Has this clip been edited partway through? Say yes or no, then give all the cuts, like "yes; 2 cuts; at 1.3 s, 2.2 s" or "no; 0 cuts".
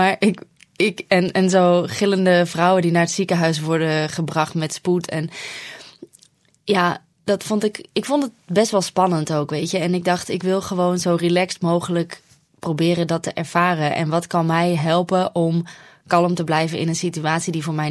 no; 0 cuts